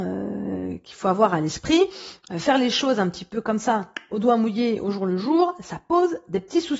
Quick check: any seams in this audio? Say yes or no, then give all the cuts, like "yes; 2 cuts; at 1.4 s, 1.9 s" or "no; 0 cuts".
no; 0 cuts